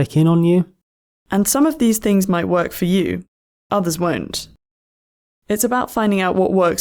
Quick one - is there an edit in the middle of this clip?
no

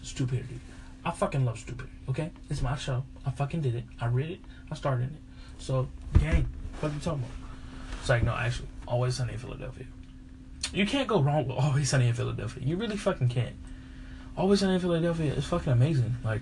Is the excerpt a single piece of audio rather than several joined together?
no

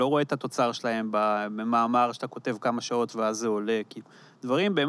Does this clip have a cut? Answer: no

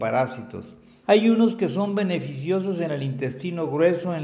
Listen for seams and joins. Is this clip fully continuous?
no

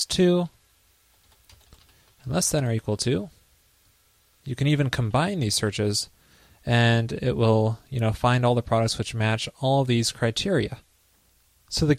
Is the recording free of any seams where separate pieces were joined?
no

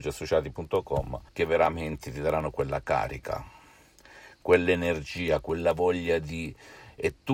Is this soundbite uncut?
no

